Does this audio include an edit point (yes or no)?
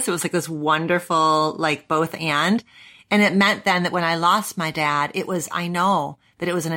no